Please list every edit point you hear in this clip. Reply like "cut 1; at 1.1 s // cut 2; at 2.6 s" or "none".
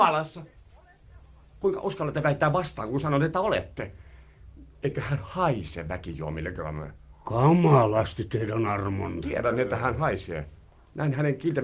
none